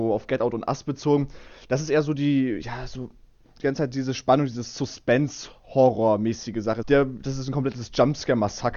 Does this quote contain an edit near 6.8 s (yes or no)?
yes